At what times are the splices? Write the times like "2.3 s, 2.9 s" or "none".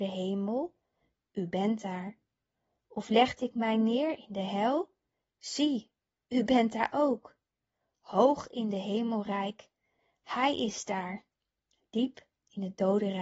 none